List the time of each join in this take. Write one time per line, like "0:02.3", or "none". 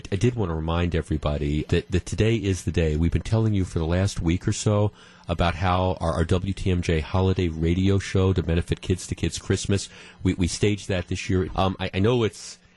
0:01.7
0:11.5